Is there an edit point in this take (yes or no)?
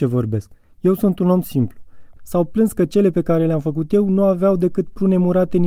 yes